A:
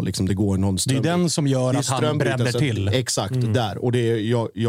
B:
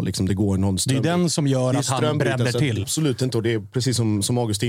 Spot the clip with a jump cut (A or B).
B